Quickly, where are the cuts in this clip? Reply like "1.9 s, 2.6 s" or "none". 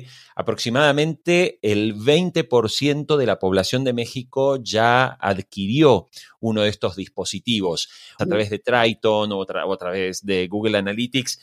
8.2 s